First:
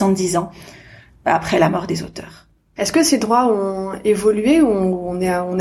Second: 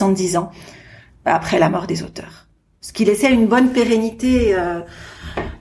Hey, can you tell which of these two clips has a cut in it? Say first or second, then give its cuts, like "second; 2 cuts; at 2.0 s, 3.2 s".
first; 1 cut; at 2.8 s